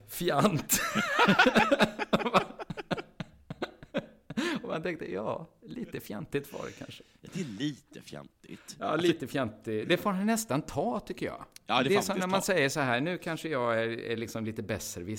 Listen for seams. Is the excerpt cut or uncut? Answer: uncut